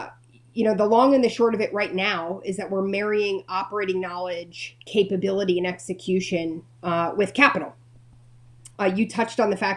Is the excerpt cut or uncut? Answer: cut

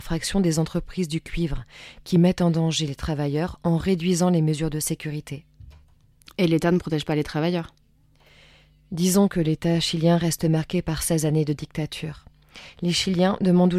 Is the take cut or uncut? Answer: uncut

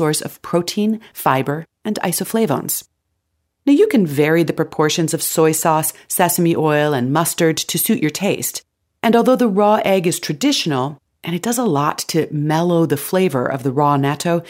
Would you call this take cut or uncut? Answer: uncut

